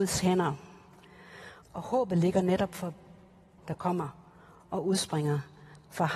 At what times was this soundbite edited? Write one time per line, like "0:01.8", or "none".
0:01.6
0:03.6